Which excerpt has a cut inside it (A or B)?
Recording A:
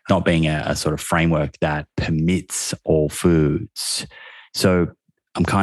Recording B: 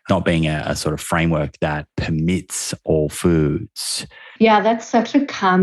B